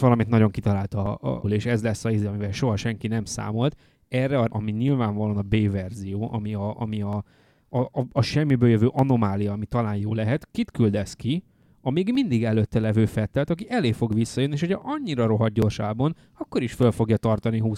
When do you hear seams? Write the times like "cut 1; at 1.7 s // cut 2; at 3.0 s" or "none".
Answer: cut 1; at 1.4 s // cut 2; at 4.5 s